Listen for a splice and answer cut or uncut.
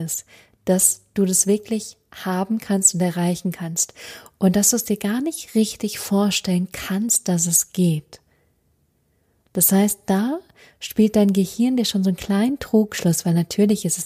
uncut